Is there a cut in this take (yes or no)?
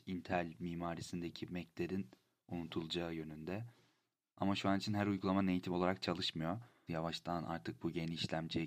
yes